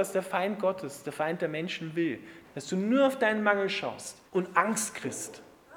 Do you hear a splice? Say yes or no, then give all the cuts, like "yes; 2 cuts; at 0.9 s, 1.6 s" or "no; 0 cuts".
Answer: yes; 2 cuts; at 2.4 s, 4.3 s